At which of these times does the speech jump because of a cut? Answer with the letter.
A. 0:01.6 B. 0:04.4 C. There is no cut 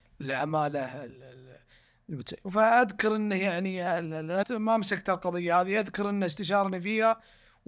B